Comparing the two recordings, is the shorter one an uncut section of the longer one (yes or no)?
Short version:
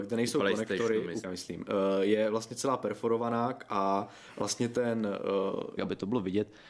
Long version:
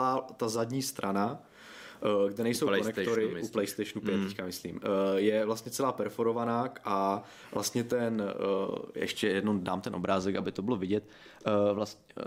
no